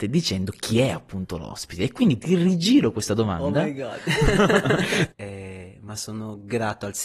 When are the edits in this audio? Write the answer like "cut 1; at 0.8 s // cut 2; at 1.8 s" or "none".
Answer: cut 1; at 5.1 s